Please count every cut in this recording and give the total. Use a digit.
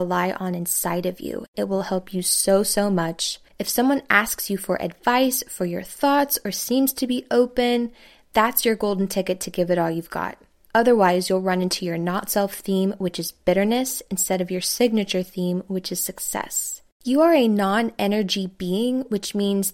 2